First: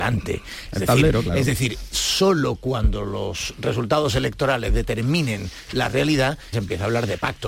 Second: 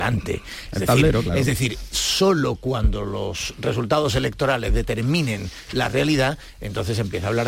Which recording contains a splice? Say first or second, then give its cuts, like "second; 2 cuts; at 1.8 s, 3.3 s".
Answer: first; 1 cut; at 6.5 s